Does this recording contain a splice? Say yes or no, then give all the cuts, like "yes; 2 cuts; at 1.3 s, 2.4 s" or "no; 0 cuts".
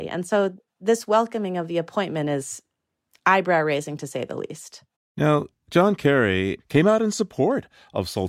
yes; 2 cuts; at 4.9 s, 6.6 s